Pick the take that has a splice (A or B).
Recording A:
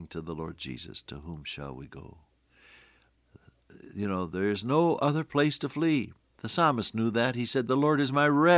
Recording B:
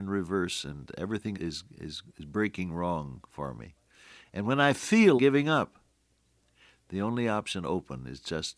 B